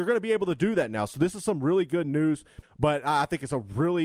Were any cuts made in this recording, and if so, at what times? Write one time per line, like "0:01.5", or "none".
0:02.6